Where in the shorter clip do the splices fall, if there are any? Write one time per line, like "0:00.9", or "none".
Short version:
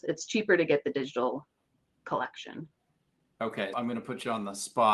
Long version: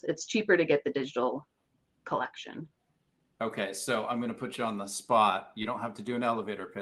0:03.7